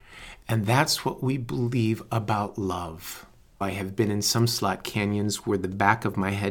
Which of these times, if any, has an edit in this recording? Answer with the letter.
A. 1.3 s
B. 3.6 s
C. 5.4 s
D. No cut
B